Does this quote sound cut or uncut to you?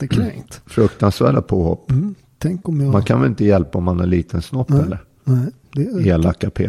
uncut